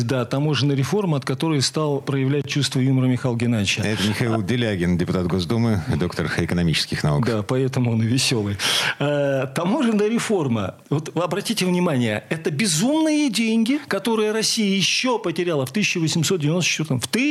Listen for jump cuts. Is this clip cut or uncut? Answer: uncut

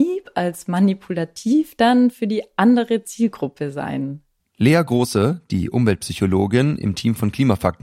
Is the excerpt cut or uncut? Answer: cut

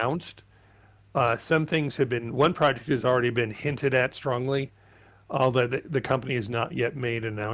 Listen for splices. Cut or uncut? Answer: uncut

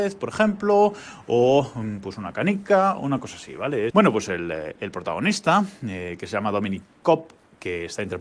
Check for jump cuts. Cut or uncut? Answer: cut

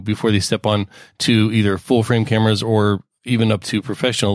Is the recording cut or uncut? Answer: uncut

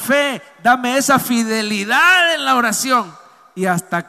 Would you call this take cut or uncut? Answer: uncut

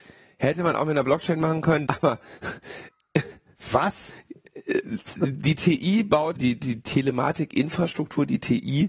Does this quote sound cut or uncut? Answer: cut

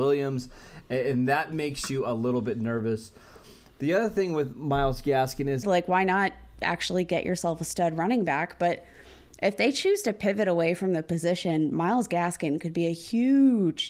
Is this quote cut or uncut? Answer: cut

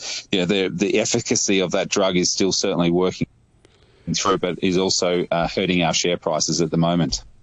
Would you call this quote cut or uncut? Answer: uncut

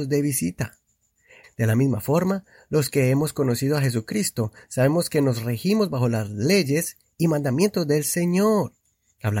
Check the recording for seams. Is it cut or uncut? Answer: cut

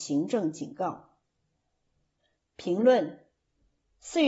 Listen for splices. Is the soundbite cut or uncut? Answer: cut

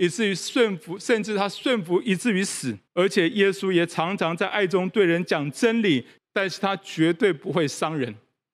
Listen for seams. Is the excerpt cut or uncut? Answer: cut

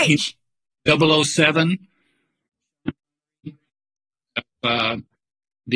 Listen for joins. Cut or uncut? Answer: uncut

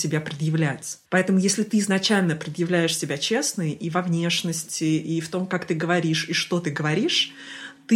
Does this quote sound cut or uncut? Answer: cut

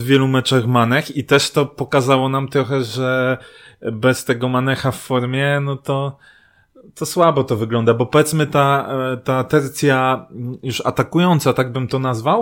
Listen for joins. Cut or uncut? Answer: uncut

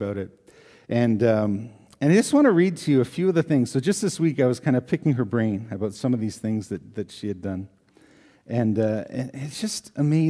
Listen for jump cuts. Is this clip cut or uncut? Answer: uncut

